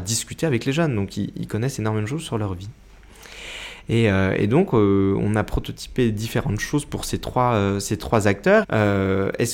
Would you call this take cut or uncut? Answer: cut